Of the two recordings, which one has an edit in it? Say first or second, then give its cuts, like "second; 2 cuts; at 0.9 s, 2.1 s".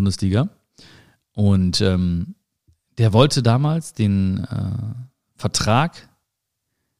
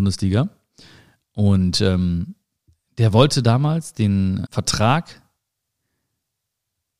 second; 1 cut; at 4.5 s